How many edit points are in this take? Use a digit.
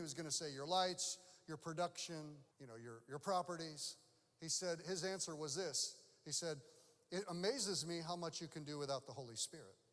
1